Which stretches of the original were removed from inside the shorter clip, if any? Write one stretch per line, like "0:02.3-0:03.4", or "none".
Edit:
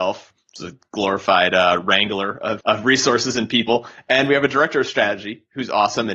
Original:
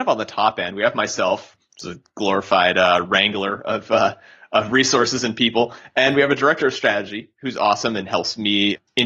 0:03.8-0:04.5